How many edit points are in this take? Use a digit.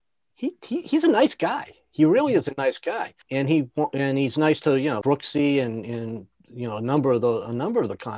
2